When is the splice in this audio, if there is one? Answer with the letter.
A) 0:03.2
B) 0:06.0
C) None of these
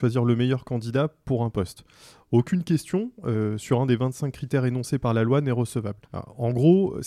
B